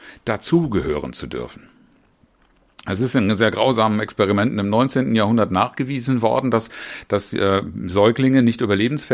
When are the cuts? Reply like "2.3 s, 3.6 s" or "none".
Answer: none